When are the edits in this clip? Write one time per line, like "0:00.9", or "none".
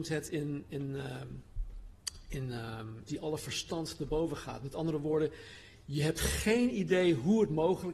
0:03.1